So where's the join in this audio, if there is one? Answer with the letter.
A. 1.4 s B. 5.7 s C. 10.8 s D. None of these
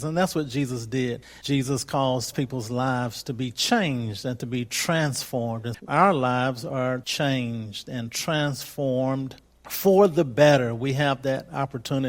B